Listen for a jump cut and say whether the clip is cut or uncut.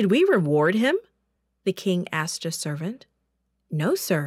uncut